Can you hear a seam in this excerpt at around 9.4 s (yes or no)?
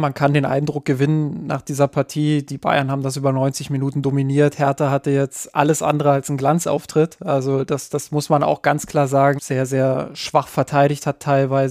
yes